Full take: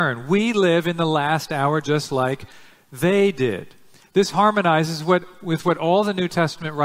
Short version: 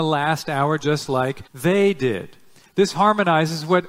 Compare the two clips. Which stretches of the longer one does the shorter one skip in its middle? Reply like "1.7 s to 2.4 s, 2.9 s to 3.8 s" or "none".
2.5 s to 2.8 s